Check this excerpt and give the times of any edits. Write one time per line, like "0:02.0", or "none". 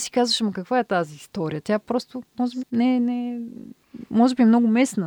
0:02.6